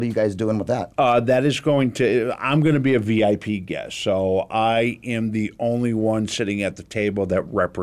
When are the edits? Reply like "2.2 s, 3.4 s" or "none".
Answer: none

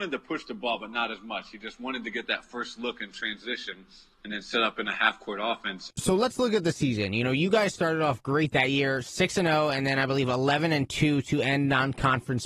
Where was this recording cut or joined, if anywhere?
5.9 s

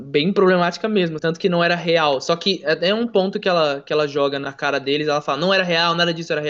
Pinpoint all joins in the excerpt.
1.2 s

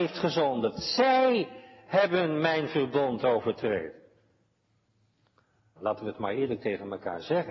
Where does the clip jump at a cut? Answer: 5.8 s

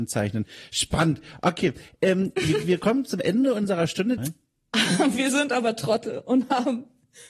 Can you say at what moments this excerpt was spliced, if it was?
4.2 s

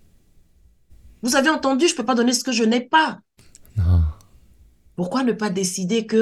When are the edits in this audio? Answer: none

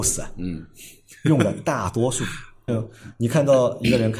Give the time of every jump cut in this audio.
2.7 s

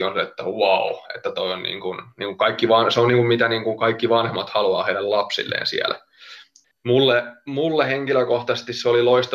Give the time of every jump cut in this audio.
6.6 s

